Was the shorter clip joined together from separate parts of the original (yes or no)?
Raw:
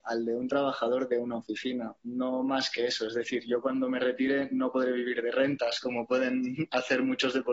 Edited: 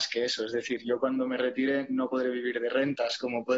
no